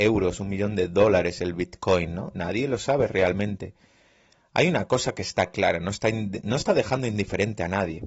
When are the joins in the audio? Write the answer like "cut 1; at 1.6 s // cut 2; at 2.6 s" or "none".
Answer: none